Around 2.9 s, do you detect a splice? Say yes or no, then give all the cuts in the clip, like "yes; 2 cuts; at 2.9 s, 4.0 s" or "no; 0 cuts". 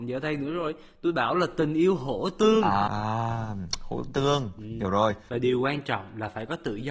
yes; 2 cuts; at 2.9 s, 5.3 s